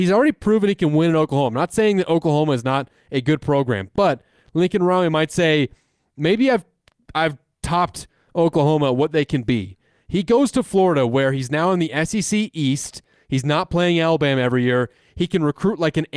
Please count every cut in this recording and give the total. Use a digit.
0